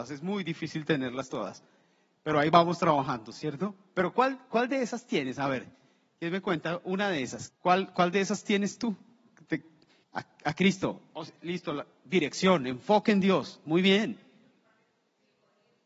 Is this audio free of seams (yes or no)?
no